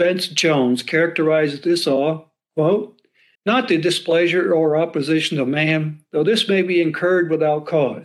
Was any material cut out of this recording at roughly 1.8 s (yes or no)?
no